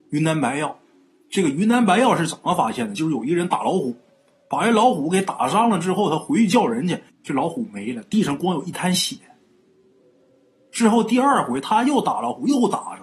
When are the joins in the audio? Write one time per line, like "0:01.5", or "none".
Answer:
0:07.1